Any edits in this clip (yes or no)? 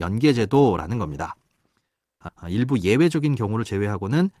yes